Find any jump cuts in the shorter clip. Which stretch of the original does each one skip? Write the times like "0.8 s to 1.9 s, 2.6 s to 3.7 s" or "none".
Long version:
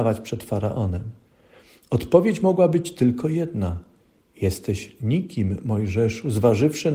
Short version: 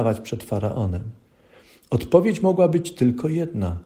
none